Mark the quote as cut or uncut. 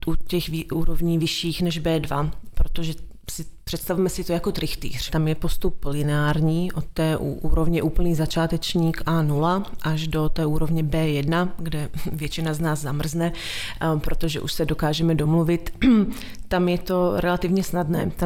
cut